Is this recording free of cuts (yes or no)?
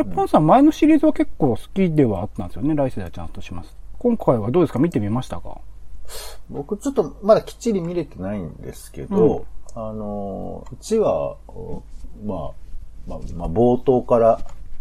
no